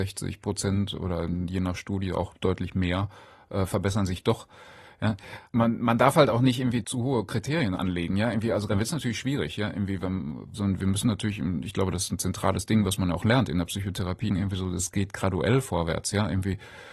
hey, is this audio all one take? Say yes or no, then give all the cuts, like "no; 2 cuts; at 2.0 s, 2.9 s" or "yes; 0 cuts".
no; 1 cut; at 14.3 s